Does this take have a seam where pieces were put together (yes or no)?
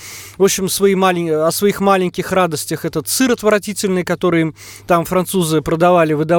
no